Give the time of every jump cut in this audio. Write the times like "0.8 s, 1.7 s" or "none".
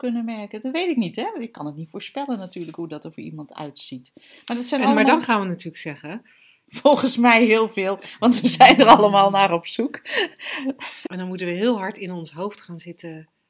6.7 s, 11.0 s

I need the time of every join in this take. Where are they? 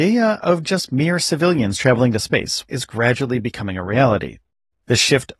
2.7 s

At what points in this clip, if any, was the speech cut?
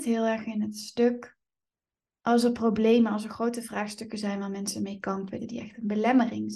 5.4 s

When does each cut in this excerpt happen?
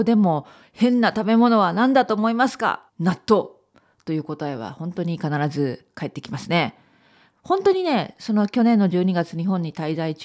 2.9 s, 7.3 s

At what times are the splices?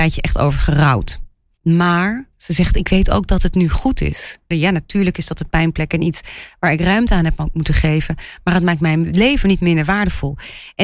4.5 s

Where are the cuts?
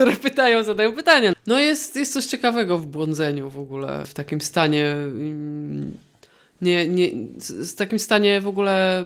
1.3 s, 4.0 s

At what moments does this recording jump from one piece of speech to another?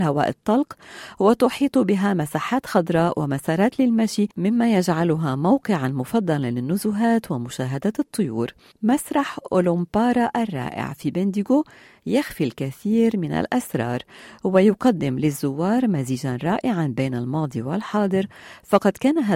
4.3 s

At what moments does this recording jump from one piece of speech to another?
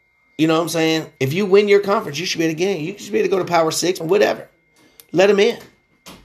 1.2 s, 4.0 s

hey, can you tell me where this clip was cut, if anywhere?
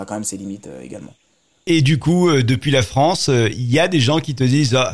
none

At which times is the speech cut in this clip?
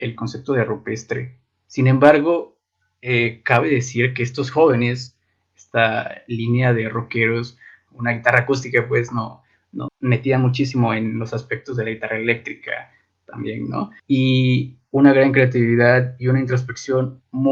7.9 s, 9.9 s, 14.0 s

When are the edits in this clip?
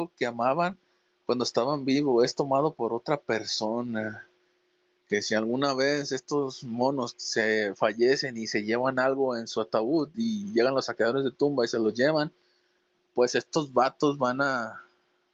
5.0 s

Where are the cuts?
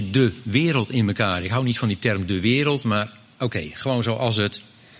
none

